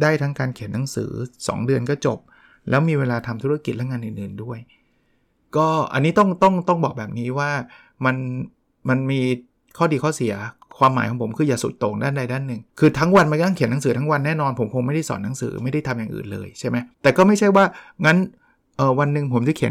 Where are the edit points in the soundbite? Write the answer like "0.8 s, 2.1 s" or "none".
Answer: 12.7 s, 16.9 s